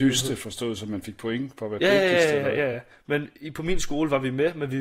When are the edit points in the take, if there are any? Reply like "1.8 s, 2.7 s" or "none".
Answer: none